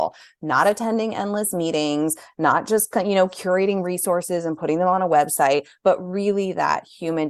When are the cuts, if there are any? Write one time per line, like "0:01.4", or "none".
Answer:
none